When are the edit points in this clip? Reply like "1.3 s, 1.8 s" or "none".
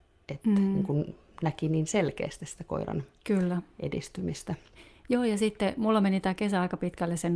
none